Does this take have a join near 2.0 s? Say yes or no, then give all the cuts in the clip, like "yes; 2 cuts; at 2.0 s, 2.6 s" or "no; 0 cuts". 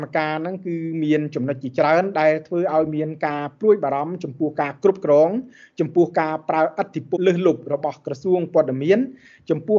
no; 1 cut; at 7.1 s